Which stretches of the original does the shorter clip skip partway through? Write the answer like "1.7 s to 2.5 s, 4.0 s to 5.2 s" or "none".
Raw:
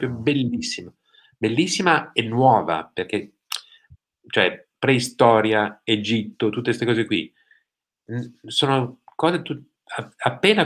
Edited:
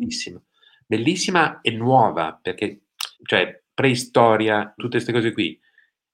3.6 s to 4.2 s, 5.8 s to 6.5 s